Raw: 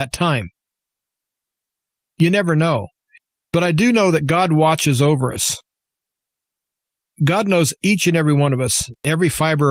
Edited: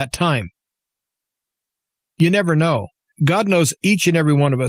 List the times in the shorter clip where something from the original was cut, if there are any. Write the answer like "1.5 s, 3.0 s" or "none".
3.1 s